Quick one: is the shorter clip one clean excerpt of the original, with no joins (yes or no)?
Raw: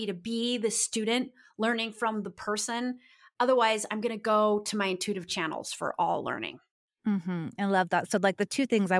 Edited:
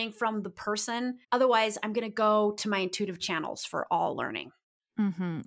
no